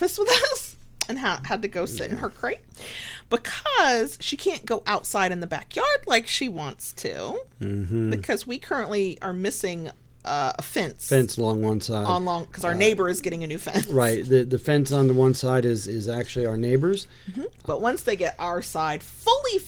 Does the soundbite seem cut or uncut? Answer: cut